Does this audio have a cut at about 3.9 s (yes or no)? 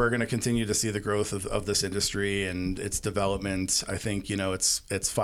no